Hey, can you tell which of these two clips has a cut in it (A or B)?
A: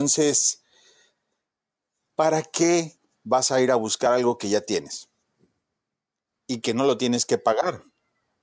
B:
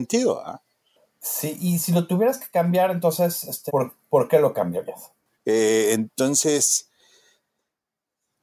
B